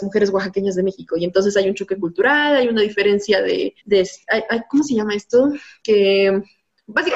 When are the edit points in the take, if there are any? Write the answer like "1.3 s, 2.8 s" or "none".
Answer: 3.8 s